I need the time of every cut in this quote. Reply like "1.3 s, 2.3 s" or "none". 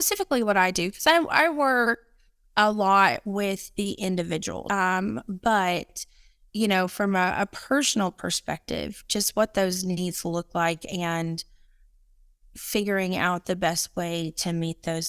4.7 s